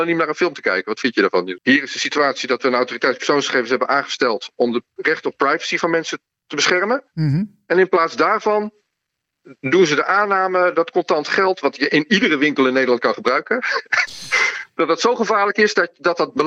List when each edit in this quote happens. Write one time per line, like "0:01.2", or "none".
0:01.6